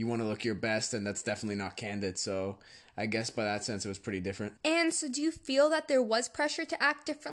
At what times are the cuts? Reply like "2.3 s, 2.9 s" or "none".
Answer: 4.6 s